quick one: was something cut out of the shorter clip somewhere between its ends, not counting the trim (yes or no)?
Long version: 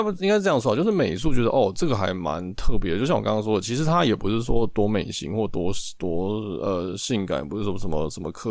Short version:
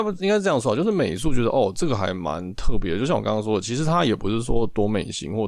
no